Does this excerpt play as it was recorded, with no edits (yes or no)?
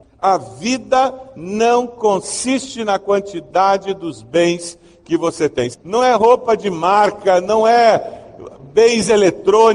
no